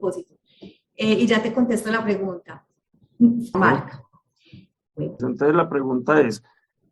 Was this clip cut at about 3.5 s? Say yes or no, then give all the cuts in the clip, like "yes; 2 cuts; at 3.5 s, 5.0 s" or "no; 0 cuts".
yes; 2 cuts; at 3.5 s, 5.2 s